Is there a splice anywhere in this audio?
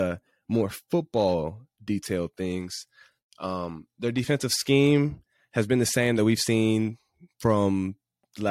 no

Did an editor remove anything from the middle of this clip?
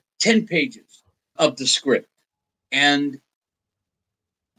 yes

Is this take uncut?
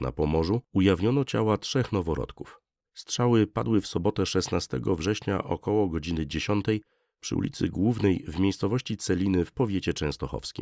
no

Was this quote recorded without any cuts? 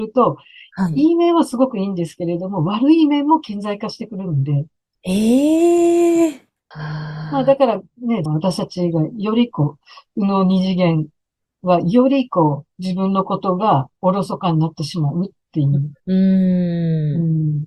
no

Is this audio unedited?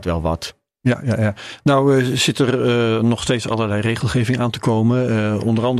yes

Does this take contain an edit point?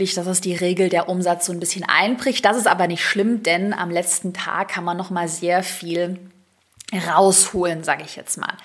no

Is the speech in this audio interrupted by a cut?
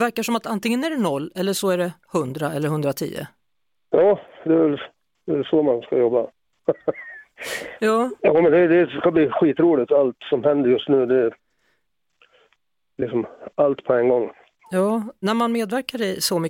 no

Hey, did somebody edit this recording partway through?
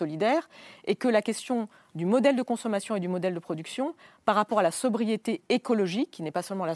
no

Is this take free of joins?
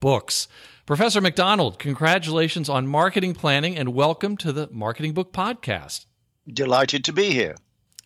yes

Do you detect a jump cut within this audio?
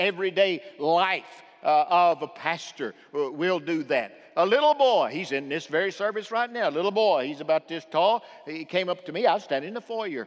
no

